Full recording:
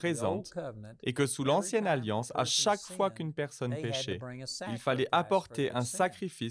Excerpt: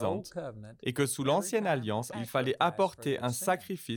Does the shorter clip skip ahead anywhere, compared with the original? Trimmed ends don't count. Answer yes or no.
yes